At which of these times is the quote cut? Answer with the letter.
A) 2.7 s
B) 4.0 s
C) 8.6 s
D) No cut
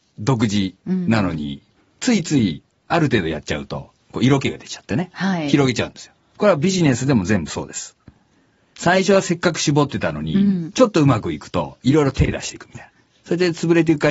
B